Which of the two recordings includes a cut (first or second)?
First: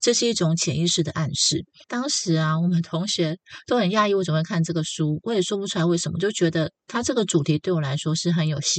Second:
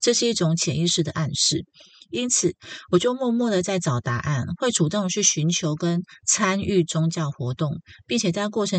first